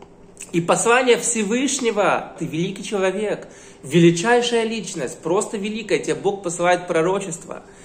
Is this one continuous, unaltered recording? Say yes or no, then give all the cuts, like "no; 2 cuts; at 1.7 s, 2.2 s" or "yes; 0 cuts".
no; 1 cut; at 2.4 s